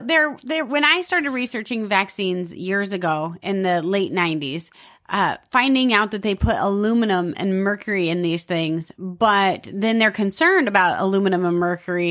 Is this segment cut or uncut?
uncut